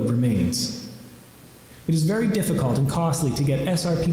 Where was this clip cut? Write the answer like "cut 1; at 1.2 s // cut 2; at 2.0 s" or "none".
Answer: cut 1; at 1.8 s